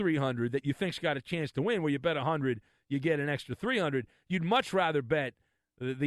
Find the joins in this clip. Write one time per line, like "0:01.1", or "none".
none